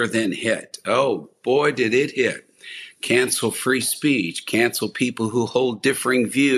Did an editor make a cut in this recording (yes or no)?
no